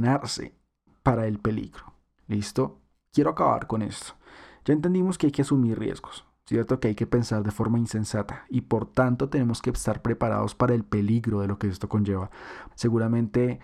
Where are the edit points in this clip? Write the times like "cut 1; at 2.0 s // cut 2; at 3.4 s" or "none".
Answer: cut 1; at 12.7 s